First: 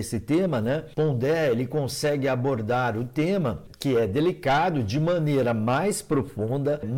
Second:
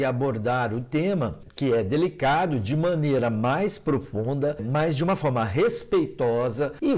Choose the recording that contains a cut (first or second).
first